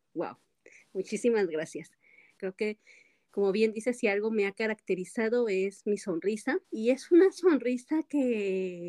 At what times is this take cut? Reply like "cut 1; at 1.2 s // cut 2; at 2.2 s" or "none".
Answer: cut 1; at 2.4 s // cut 2; at 6.6 s